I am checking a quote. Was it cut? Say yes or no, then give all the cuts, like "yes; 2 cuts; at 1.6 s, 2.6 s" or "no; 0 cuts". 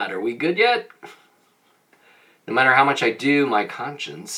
no; 0 cuts